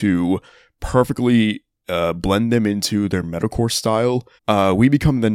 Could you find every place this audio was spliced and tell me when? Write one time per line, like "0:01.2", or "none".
0:04.4